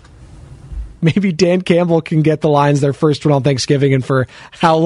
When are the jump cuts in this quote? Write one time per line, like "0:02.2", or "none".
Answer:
0:01.0